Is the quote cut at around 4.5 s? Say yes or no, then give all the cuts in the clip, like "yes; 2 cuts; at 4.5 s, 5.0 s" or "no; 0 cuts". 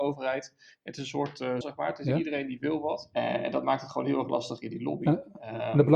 no; 2 cuts; at 1.6 s, 3.1 s